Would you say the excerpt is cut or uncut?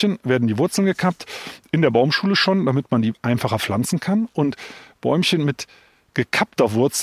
uncut